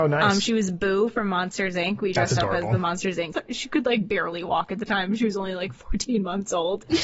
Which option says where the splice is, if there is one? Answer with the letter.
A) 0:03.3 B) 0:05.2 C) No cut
A